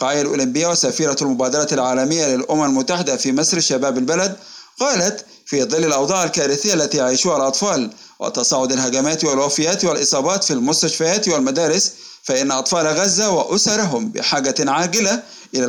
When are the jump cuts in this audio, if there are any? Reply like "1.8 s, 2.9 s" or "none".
none

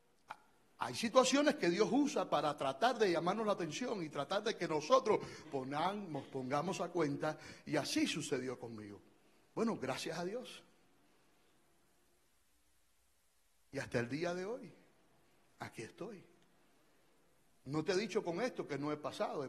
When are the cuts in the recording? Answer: 5.4 s

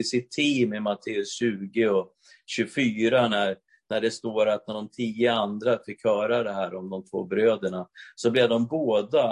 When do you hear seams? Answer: none

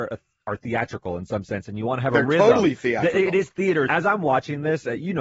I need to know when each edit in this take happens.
3.9 s

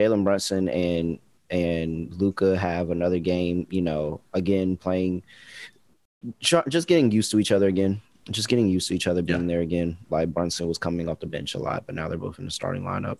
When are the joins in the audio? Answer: 10.1 s

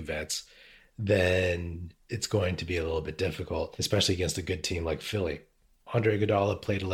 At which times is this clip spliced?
none

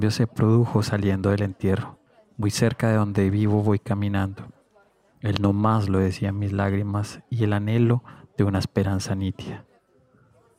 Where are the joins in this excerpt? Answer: none

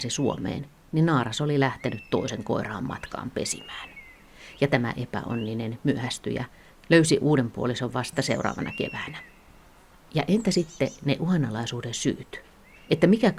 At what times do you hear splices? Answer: none

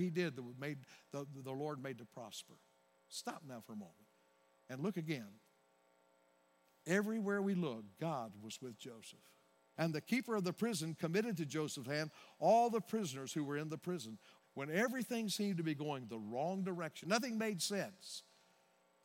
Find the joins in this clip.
9.8 s, 14.4 s, 17.0 s

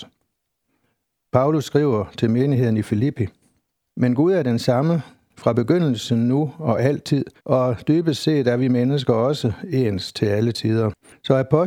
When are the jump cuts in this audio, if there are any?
3.9 s, 7.4 s

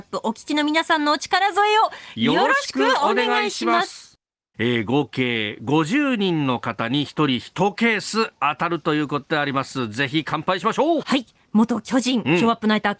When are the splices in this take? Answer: 4.5 s, 11.0 s

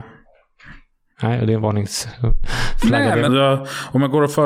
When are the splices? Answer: 3.3 s

